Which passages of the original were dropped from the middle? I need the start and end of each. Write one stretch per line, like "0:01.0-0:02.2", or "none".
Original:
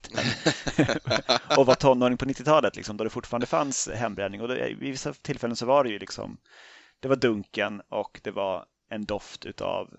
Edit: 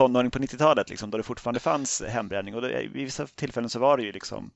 none